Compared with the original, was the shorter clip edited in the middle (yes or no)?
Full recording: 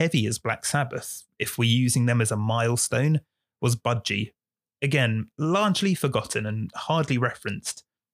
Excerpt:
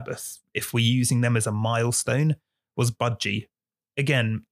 no